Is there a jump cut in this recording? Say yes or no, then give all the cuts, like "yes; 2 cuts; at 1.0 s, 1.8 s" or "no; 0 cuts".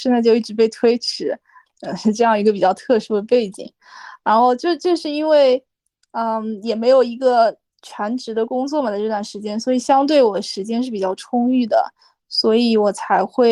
yes; 1 cut; at 1.7 s